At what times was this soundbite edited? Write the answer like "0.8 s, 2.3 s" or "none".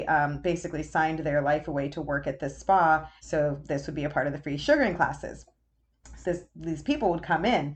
3.2 s, 6.2 s